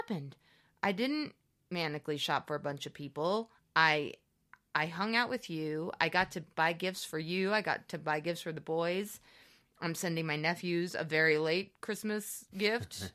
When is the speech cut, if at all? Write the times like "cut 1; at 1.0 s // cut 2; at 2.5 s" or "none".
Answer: none